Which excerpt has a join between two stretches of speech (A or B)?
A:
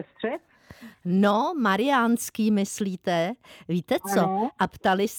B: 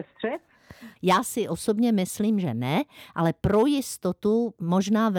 B